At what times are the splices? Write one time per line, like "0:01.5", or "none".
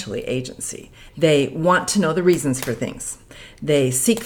0:01.1